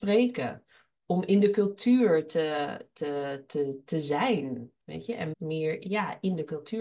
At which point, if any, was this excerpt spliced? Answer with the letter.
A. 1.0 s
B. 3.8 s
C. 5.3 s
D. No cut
C